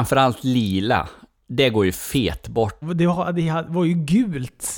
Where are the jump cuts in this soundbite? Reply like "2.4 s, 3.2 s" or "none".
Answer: 2.8 s